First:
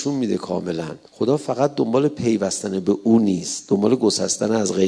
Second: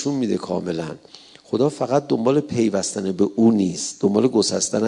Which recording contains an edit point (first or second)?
first